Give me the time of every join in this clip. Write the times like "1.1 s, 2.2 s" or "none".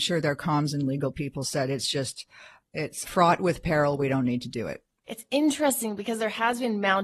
3.0 s

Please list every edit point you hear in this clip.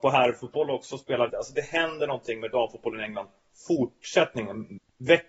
1.3 s

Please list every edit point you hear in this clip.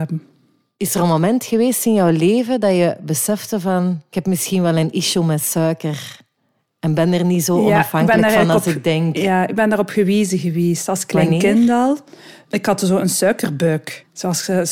none

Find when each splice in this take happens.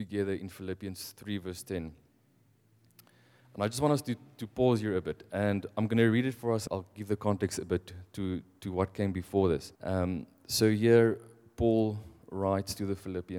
6.7 s, 9.8 s

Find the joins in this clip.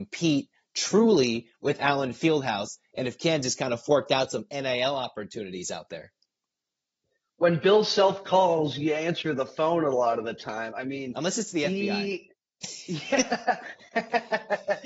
none

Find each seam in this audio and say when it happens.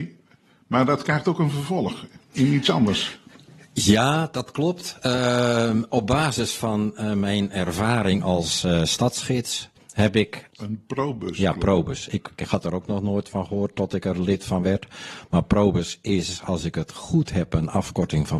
10.5 s

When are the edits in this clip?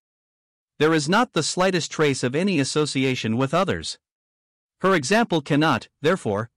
4.6 s

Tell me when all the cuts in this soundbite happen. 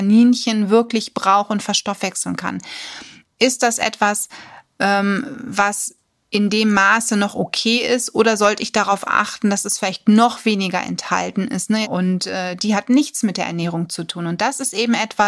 11.8 s

